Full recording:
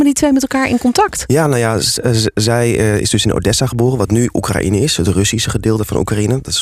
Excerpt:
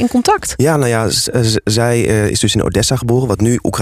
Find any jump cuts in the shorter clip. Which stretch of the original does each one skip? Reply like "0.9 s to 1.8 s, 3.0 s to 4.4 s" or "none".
none